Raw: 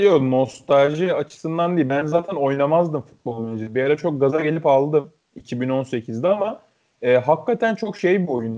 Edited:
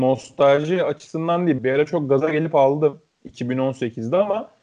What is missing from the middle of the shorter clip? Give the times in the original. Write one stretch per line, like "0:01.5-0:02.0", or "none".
0:01.9-0:03.7